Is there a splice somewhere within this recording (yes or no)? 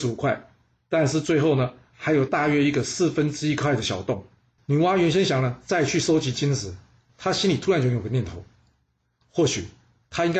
yes